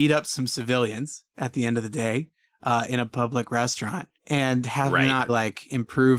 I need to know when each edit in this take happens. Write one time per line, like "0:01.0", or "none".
0:04.2
0:05.3